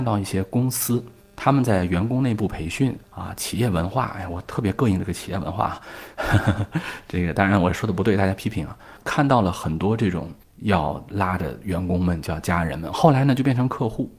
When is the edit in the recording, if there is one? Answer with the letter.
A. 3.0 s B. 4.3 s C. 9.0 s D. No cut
A